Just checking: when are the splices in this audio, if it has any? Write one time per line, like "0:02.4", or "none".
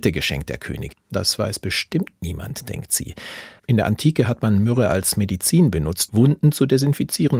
0:00.9
0:03.6
0:06.1